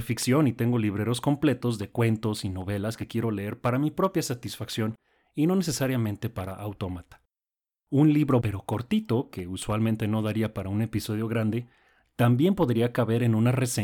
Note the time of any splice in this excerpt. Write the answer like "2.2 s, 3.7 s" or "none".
8.4 s

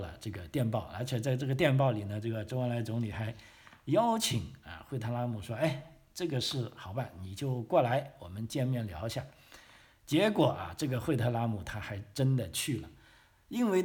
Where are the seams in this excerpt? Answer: none

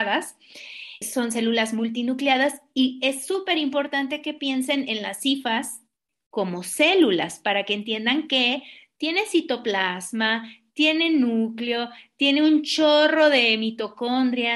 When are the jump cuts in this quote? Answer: 1.0 s

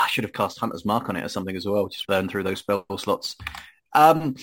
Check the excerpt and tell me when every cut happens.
2.0 s

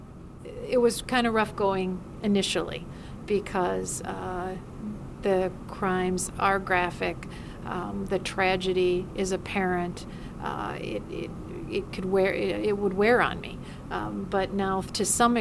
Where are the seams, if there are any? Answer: none

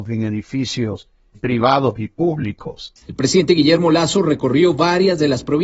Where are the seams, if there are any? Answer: 1.3 s, 3.0 s

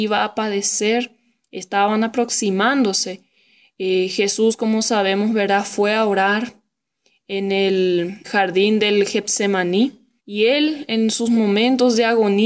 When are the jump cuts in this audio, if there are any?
8.2 s, 10.2 s

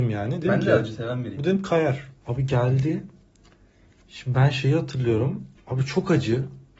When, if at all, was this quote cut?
2.2 s, 5.6 s

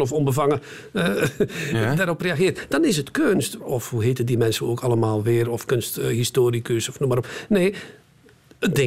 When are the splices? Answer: 3.6 s

